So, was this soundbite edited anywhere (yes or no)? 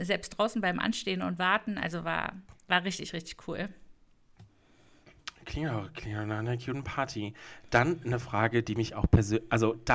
no